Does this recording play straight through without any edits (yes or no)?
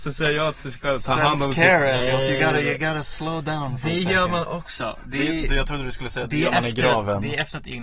yes